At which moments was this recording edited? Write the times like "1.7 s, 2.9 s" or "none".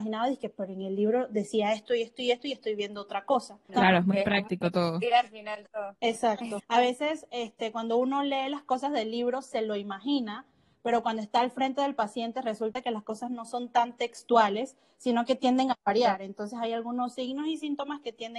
3.7 s, 6.6 s